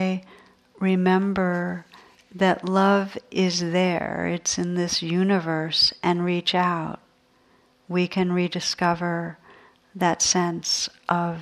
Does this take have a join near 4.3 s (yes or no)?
no